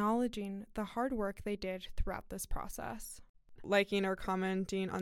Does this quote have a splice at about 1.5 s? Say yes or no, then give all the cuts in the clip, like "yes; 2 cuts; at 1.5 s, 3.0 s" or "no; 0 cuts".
no; 1 cut; at 3.6 s